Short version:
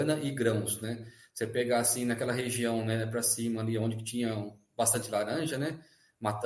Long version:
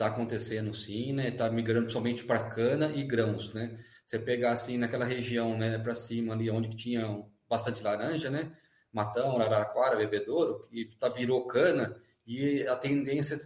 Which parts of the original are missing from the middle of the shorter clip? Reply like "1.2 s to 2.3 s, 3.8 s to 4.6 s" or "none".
none